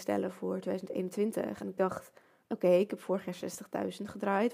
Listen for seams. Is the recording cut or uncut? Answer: uncut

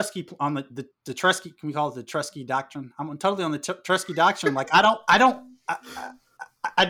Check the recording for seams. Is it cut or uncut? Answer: uncut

